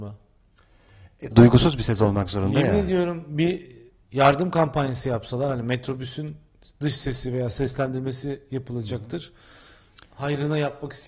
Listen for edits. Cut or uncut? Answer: cut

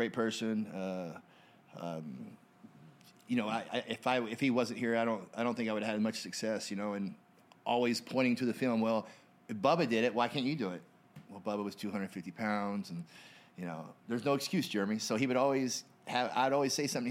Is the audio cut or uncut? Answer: uncut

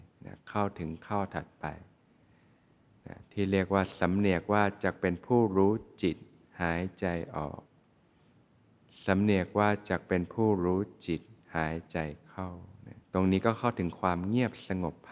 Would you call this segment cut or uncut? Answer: cut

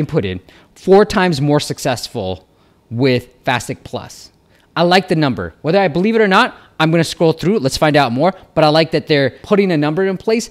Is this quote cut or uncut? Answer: uncut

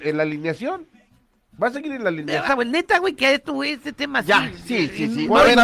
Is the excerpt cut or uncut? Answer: cut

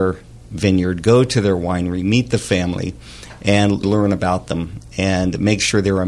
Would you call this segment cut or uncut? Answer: cut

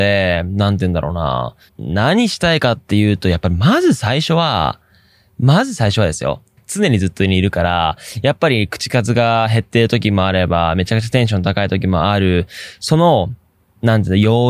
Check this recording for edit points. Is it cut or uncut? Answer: cut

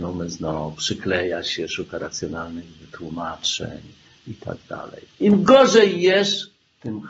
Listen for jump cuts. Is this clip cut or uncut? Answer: cut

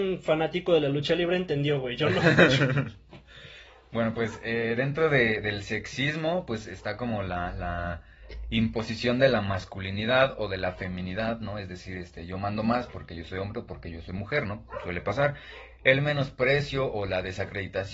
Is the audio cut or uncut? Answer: uncut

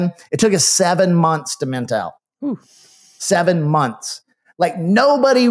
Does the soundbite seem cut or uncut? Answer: uncut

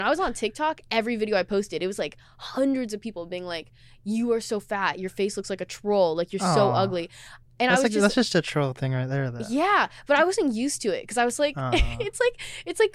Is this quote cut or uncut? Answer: uncut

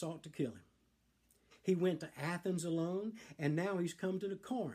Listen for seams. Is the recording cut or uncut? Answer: cut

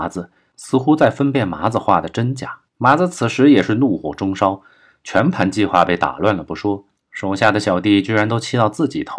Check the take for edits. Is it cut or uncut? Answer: cut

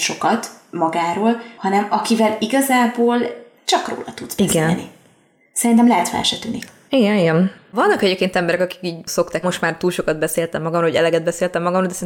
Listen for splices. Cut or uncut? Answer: cut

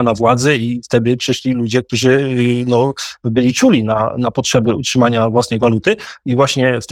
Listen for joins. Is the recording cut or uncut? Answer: uncut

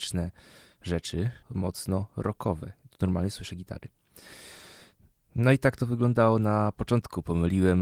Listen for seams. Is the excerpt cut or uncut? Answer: cut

